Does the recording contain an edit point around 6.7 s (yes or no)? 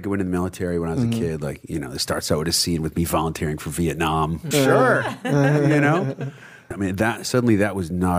yes